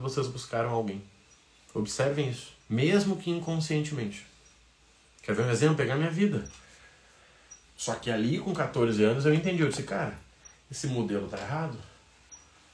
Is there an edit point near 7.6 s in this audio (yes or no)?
yes